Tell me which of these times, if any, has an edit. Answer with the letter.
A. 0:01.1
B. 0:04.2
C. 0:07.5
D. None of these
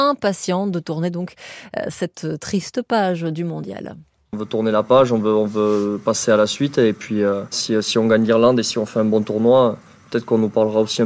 C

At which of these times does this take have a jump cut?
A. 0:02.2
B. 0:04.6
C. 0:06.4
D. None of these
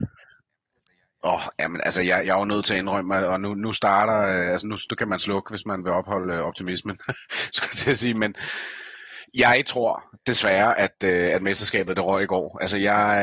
A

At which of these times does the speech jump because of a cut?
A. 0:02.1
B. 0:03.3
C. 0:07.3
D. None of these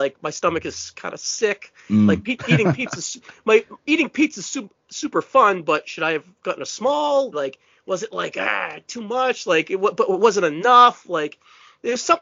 C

